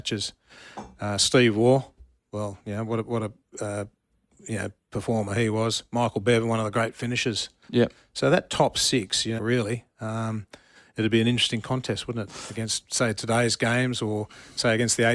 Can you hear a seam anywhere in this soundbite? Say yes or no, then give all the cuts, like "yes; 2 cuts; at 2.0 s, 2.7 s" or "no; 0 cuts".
yes; 1 cut; at 9.4 s